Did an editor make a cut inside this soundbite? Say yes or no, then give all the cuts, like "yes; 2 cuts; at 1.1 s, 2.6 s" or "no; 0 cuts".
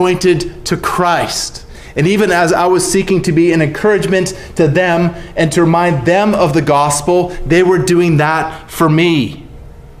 no; 0 cuts